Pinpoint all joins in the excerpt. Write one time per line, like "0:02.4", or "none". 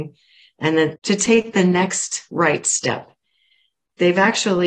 none